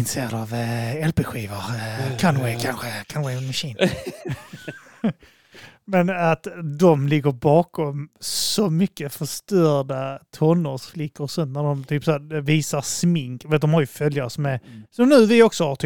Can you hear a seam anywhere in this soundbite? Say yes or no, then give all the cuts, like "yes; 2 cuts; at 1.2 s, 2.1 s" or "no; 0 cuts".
no; 0 cuts